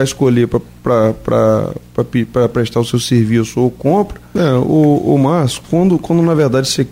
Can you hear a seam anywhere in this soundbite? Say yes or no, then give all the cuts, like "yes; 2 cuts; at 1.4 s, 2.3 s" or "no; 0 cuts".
yes; 1 cut; at 4.4 s